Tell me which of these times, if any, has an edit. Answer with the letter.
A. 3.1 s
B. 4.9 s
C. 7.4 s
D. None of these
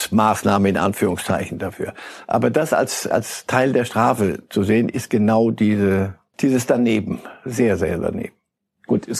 A